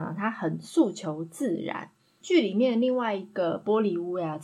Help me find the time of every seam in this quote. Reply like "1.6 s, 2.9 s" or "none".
2.2 s